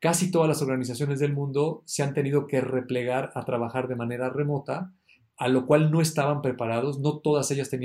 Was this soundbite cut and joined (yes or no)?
no